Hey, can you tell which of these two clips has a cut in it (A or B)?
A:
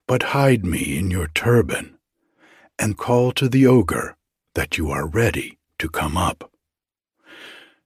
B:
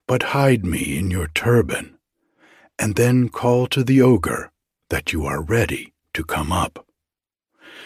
A